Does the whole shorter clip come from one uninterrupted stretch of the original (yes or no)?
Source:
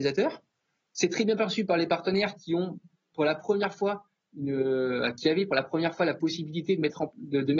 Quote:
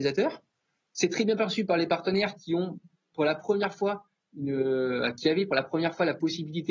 yes